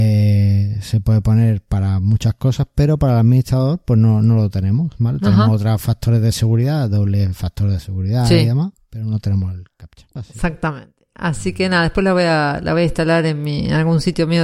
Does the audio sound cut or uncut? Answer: cut